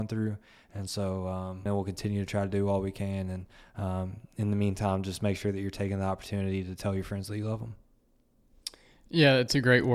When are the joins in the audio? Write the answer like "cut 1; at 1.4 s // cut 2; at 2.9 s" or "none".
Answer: cut 1; at 1.7 s